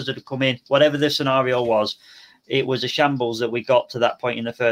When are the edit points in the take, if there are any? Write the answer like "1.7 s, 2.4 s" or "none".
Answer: none

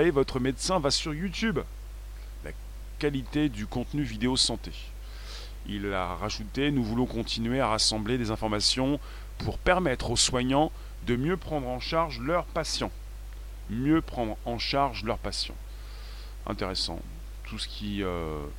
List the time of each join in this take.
2.4 s

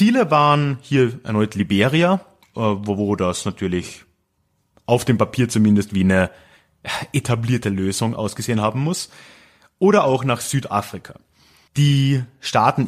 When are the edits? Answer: 11.7 s

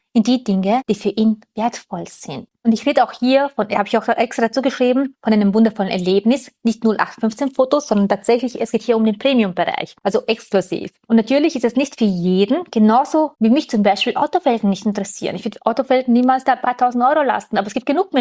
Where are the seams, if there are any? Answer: none

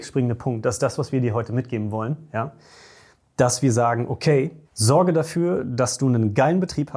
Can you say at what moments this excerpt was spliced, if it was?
4.6 s

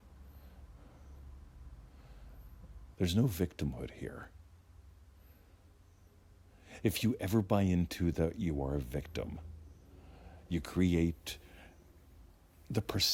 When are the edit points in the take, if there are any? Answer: 2.9 s, 6.8 s

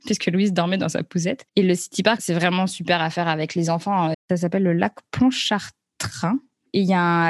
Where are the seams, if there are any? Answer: 1.5 s, 4.1 s

